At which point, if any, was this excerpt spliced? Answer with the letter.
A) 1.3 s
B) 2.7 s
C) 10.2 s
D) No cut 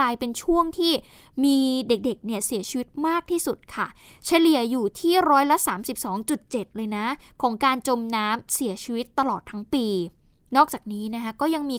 D